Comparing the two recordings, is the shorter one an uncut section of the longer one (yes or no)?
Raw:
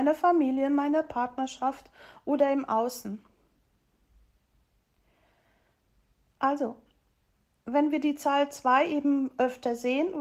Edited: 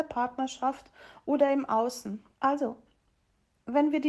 no